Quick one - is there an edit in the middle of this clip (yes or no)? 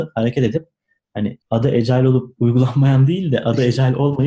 yes